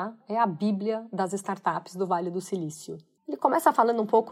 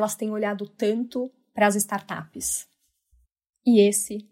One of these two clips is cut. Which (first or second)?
first